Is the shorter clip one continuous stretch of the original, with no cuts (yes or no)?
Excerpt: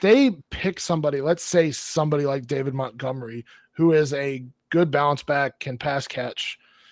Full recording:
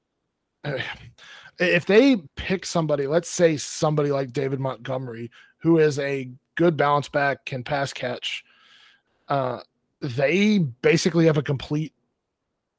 yes